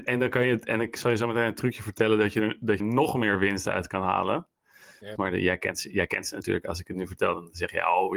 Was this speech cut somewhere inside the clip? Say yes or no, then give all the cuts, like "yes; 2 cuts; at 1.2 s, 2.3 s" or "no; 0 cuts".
yes; 2 cuts; at 2.8 s, 5.2 s